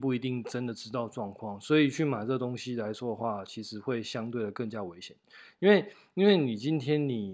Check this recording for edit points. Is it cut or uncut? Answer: uncut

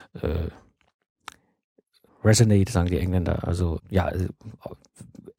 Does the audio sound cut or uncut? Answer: cut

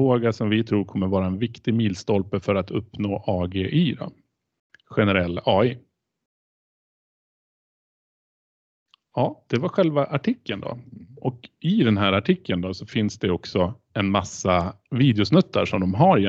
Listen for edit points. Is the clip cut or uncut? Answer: uncut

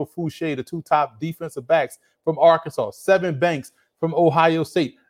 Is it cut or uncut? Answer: uncut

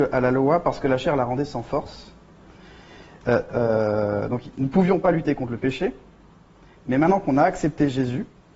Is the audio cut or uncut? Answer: cut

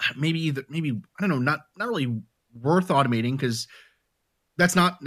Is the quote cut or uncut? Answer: uncut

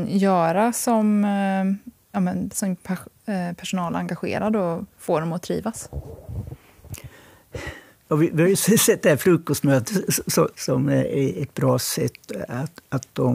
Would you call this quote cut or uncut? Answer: cut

